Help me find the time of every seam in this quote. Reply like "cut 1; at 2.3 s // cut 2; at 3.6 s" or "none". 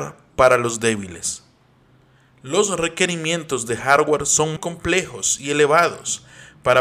cut 1; at 4.6 s

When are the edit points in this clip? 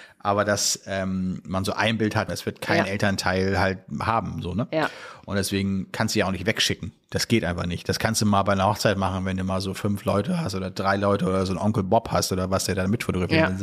cut 1; at 2.3 s

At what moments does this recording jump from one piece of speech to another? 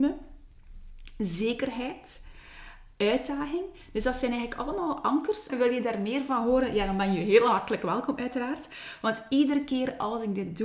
cut 1; at 5.5 s

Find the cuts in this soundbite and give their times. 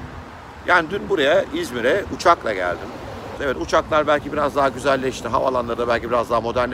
cut 1; at 3.4 s

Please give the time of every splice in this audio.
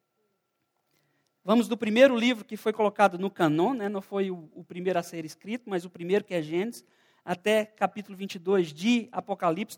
none

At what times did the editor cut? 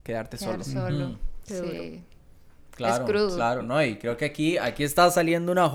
none

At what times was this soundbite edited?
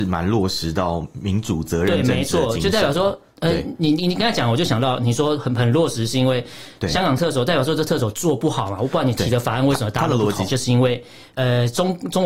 cut 1; at 10.5 s

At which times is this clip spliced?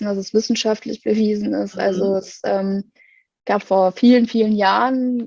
cut 1; at 3.6 s

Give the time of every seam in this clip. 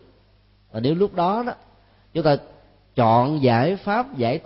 none

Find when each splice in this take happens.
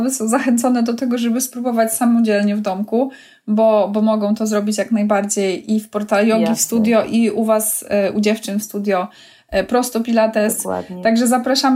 none

